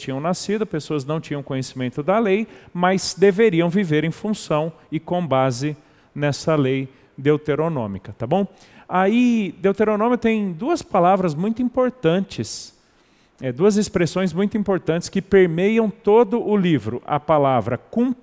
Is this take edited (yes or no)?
no